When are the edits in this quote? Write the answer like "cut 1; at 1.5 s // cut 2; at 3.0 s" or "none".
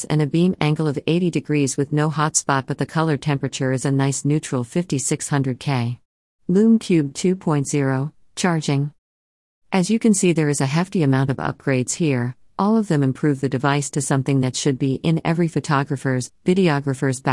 cut 1; at 6.4 s